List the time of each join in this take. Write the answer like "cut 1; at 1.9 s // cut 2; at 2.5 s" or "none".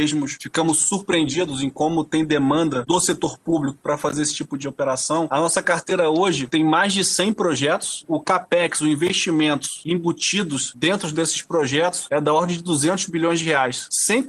none